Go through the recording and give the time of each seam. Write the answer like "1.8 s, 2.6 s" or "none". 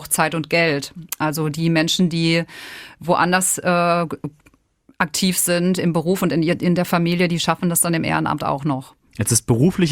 none